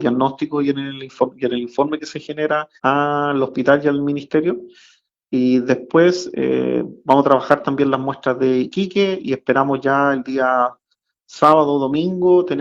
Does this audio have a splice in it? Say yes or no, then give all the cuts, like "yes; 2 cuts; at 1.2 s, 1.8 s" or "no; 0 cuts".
yes; 1 cut; at 2.8 s